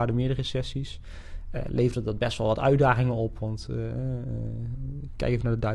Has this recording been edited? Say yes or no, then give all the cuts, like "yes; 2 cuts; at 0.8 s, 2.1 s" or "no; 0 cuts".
no; 0 cuts